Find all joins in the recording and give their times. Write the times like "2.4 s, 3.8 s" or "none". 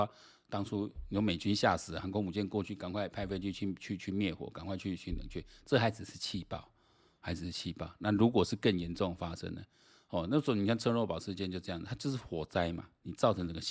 3.1 s